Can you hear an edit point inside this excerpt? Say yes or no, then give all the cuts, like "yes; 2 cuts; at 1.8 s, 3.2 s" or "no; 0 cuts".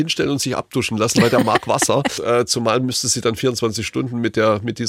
yes; 1 cut; at 2.2 s